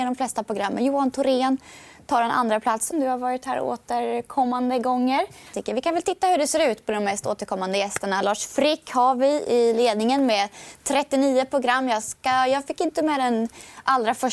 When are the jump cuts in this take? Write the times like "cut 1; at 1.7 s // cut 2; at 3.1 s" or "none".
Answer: cut 1; at 2.9 s // cut 2; at 5.5 s